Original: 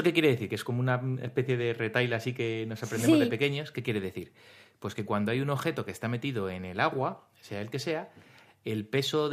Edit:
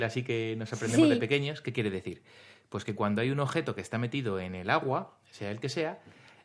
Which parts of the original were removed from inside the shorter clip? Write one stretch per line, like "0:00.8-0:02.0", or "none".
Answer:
none